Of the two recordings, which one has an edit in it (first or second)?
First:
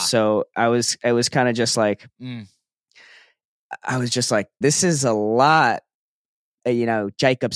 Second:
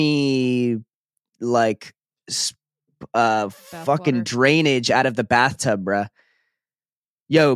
first